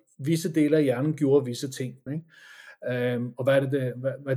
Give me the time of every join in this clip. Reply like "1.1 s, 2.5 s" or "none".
2.1 s